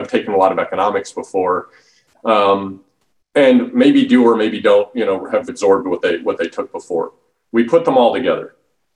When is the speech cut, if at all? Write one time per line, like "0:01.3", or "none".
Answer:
0:05.5

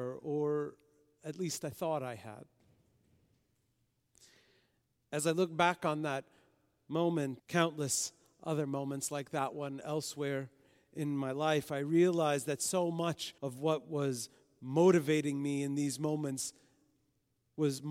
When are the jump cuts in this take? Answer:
0:07.4
0:13.4

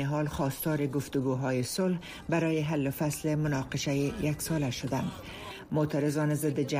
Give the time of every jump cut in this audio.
none

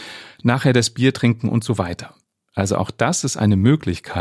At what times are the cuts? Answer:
none

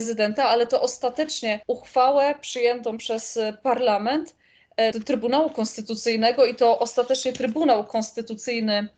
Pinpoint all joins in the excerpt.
0:01.6
0:04.9

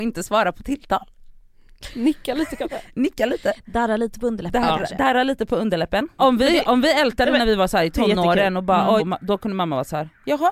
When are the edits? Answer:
0:06.2
0:09.0

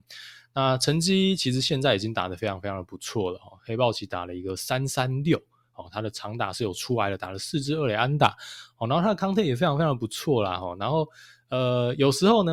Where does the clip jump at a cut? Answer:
none

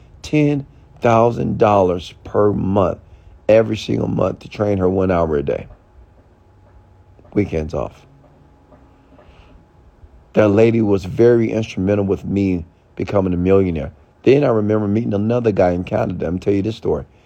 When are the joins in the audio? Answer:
none

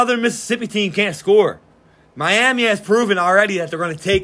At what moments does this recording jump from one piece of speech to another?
none

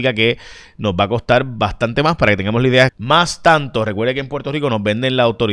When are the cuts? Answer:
0:02.9

